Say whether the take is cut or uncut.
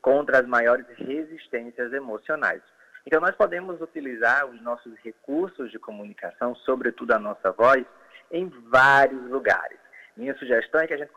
cut